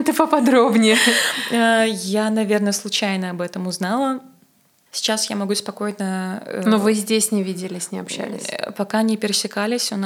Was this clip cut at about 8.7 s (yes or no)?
no